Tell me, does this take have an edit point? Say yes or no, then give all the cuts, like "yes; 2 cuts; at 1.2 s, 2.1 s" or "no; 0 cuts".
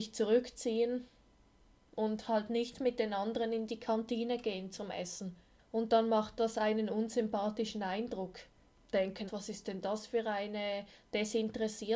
yes; 1 cut; at 9.3 s